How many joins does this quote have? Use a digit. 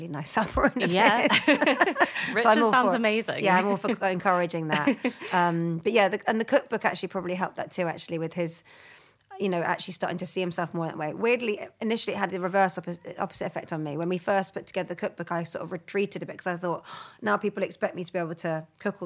0